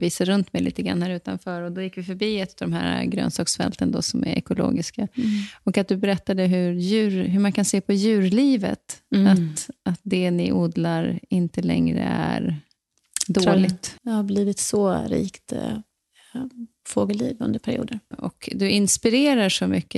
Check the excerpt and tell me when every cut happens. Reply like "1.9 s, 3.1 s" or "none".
14.0 s, 18.1 s